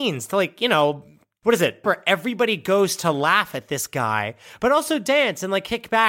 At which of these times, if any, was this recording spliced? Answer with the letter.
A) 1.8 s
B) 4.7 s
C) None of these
A